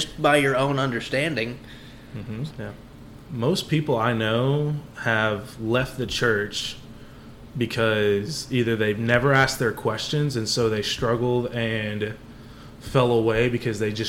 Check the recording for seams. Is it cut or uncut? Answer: cut